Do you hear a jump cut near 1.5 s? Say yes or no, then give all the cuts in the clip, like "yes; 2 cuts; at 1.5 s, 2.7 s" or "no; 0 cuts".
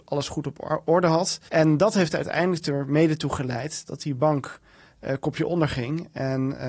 yes; 1 cut; at 1.5 s